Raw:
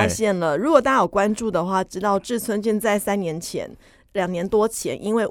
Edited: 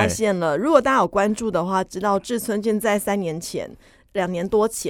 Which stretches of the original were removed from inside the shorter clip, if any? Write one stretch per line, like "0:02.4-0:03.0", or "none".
none